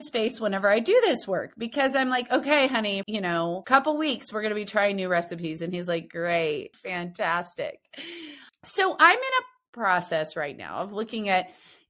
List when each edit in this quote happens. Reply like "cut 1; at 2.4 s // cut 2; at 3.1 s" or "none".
cut 1; at 3.0 s // cut 2; at 6.7 s // cut 3; at 8.5 s